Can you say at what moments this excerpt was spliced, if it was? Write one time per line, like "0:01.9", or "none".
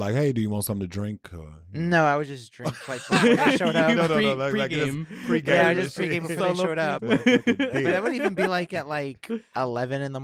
0:07.0